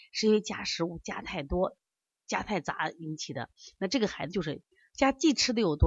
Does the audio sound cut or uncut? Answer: uncut